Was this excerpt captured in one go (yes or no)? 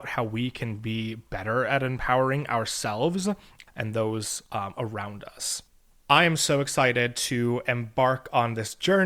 yes